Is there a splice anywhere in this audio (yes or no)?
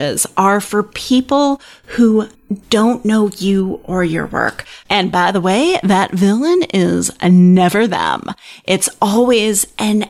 yes